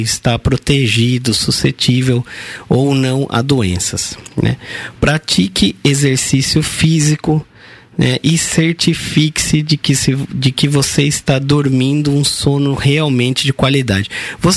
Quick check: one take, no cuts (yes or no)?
yes